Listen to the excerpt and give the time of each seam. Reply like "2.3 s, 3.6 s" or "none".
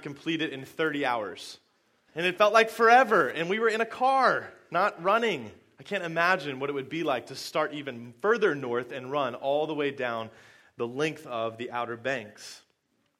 2.1 s